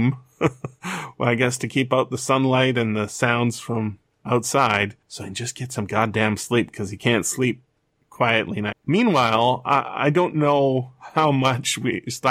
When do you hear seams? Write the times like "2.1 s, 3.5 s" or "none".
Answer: 5.0 s, 8.7 s